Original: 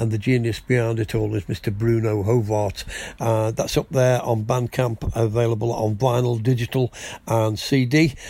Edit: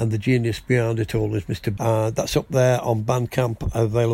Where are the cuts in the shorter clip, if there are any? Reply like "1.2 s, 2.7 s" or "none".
1.8 s